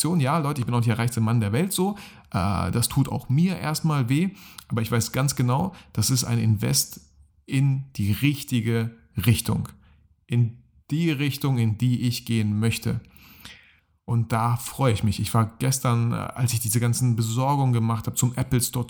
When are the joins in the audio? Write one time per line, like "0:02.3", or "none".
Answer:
none